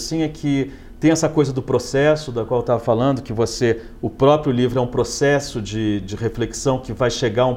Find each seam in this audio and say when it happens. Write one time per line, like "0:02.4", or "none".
0:06.0